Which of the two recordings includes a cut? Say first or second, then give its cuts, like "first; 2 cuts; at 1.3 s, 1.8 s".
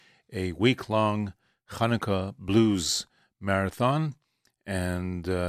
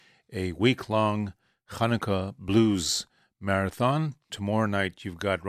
second; 1 cut; at 4.3 s